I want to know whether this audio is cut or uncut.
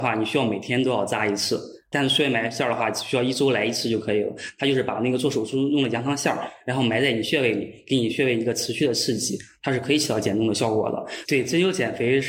cut